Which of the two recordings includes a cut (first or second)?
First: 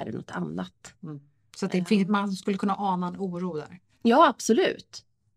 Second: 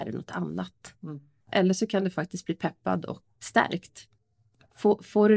second